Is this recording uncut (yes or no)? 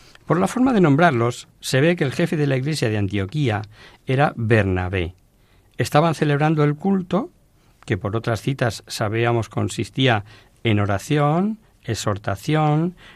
yes